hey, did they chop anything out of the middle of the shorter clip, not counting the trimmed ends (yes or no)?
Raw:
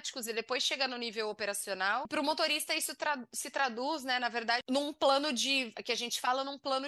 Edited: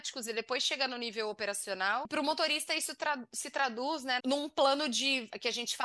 yes